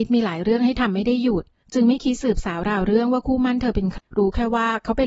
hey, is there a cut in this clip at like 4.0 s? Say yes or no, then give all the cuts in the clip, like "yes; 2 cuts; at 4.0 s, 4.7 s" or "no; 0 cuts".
yes; 1 cut; at 4.0 s